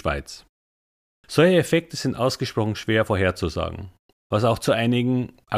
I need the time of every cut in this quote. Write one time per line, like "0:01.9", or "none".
0:01.2
0:04.1